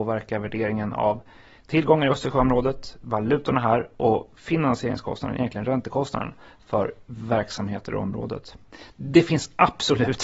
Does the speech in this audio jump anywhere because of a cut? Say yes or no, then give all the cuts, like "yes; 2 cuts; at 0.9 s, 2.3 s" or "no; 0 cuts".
no; 0 cuts